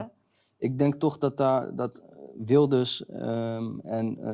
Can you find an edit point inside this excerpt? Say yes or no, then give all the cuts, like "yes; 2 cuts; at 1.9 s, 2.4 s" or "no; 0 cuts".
no; 0 cuts